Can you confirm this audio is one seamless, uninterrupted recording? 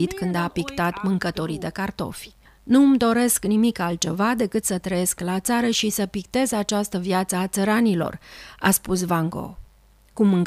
yes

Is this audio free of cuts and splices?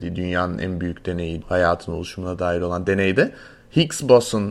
no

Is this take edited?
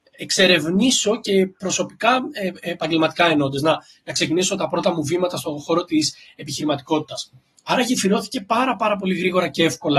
no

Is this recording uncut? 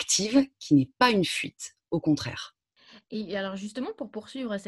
yes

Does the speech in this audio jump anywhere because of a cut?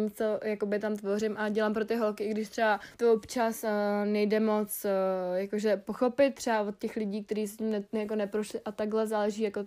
yes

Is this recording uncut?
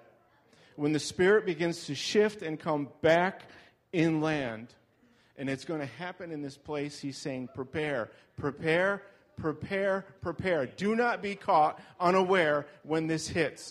yes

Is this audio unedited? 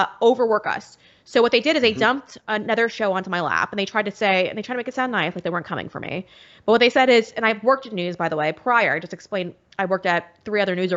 yes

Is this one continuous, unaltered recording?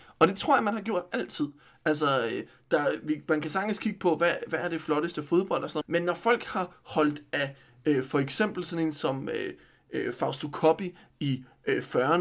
no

